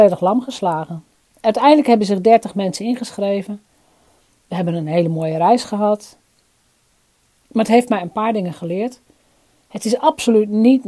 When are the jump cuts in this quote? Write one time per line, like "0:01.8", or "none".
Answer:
none